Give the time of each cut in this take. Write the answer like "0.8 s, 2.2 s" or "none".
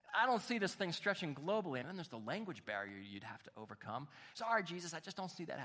1.8 s, 4.3 s